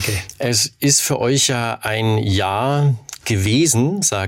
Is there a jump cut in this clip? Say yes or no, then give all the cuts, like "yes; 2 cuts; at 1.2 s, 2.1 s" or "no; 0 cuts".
no; 0 cuts